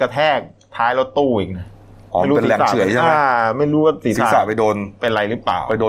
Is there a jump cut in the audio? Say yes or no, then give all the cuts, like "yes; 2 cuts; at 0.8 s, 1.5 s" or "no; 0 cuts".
no; 0 cuts